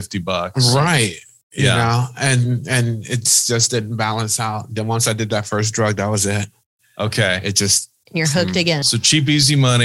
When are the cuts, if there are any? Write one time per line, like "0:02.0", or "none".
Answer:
0:08.8